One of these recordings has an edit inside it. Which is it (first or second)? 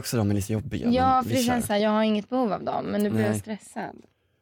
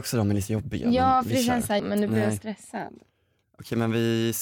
second